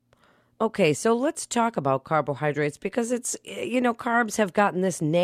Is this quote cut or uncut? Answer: uncut